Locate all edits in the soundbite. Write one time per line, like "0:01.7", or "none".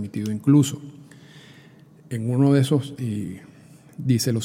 0:03.0